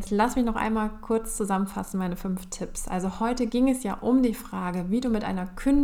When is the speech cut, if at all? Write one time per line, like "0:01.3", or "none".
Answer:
none